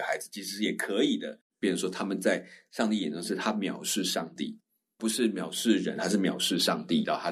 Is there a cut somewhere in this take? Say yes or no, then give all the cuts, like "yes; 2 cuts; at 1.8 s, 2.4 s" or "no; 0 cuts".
yes; 1 cut; at 1.5 s